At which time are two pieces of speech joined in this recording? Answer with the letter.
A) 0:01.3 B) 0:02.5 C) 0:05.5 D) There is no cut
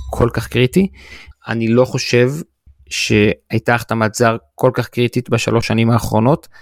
A